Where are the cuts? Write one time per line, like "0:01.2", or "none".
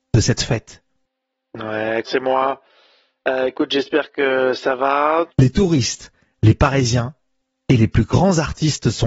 0:02.0
0:05.3